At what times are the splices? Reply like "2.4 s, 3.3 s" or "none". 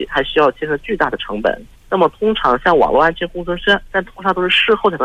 1.8 s, 3.9 s